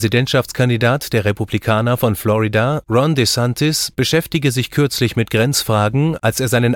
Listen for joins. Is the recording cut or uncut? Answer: uncut